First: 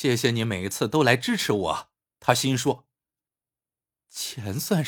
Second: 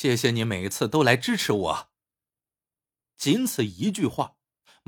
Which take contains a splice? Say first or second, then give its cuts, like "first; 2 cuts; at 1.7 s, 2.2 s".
first; 1 cut; at 2.1 s